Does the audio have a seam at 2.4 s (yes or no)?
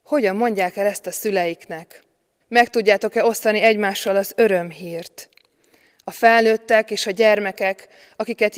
yes